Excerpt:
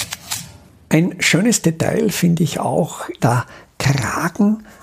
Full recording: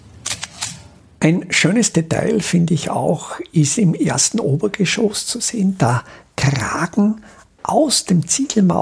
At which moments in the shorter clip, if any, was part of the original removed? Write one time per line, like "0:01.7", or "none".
0:03.2